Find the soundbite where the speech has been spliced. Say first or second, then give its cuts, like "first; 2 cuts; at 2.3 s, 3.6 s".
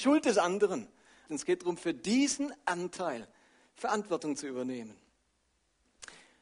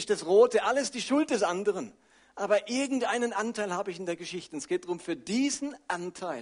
first; 1 cut; at 1.3 s